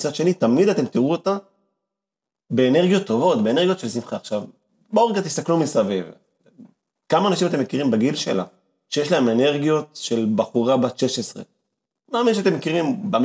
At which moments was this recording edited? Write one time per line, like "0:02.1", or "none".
none